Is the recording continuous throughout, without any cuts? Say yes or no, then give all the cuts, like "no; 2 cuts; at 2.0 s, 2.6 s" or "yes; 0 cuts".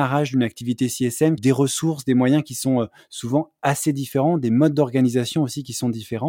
no; 1 cut; at 1.4 s